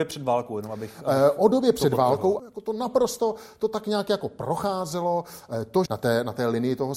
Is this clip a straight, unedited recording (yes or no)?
no